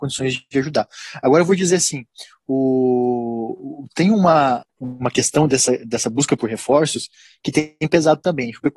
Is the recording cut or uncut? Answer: cut